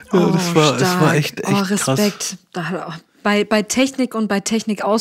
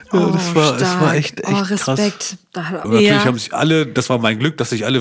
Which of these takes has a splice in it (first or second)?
second